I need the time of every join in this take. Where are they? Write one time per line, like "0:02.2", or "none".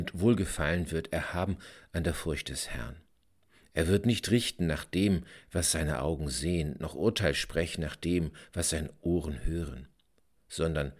none

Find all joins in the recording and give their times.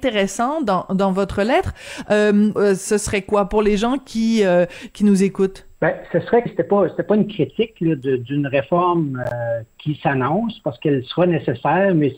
0:02.6
0:06.5

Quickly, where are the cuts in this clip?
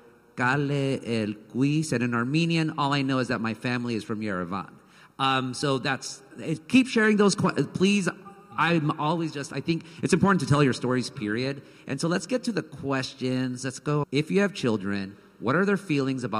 0:14.0

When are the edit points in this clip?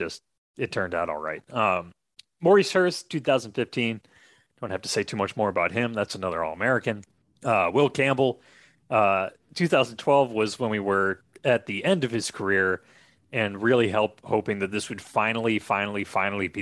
none

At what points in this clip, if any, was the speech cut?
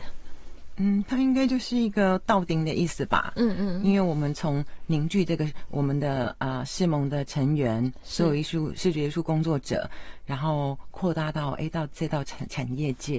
none

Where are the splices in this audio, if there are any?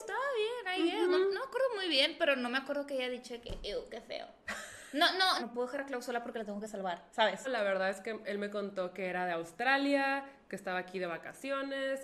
0:05.4
0:07.4

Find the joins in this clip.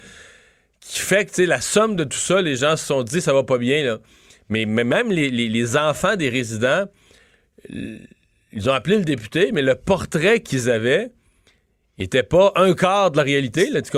none

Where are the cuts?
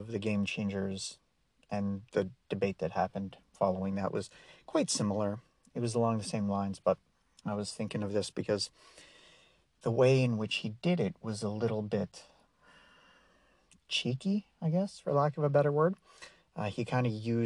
none

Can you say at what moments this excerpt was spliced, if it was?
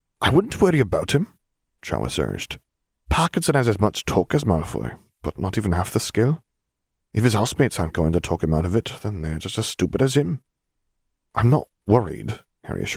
none

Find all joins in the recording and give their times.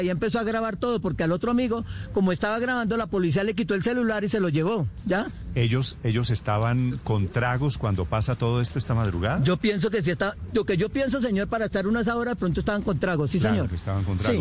none

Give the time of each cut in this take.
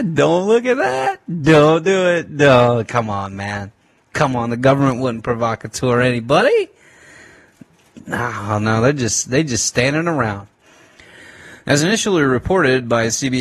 none

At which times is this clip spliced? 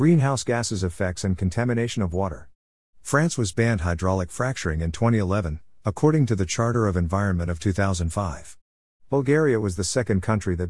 none

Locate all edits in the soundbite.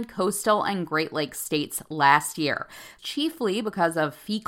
0:03.0

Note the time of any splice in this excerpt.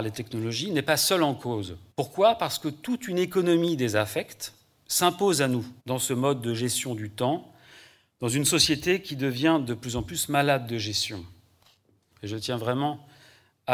0:01.9
0:05.8
0:12.1

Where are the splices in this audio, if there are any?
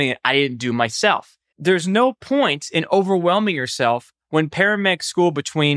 0:01.5

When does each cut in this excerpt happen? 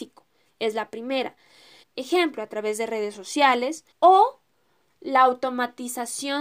0:01.8
0:03.9

